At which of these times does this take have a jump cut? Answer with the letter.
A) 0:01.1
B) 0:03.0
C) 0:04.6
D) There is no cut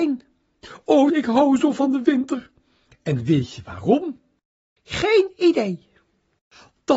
A